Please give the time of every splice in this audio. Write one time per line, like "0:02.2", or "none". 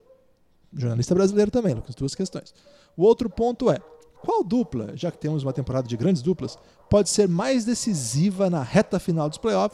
none